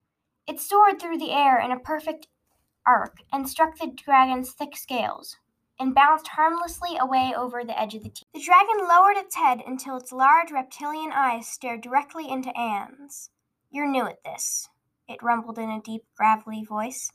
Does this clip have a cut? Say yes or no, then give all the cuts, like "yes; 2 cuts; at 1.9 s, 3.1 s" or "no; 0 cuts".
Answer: no; 0 cuts